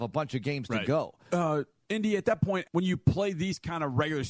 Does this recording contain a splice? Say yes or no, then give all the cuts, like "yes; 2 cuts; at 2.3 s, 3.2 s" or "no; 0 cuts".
yes; 2 cuts; at 1.3 s, 2.6 s